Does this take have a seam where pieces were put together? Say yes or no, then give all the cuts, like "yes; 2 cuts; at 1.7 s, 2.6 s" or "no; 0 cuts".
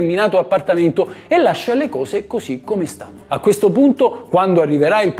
no; 0 cuts